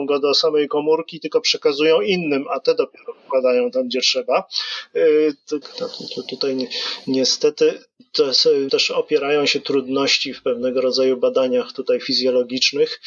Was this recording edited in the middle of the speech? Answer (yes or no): yes